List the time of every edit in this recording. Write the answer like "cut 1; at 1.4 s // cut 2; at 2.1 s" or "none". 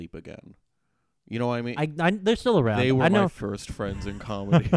cut 1; at 1.8 s